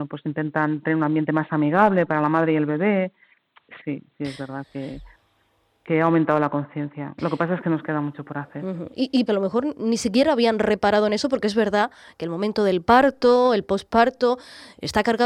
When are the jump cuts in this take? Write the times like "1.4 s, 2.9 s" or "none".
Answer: 3.8 s, 9.3 s